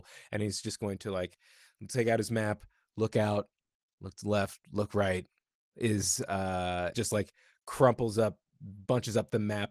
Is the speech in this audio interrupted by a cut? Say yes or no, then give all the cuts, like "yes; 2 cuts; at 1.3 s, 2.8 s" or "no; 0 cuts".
yes; 2 cuts; at 5.7 s, 6.9 s